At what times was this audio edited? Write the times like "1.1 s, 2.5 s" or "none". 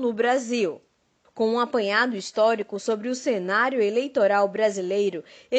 1.2 s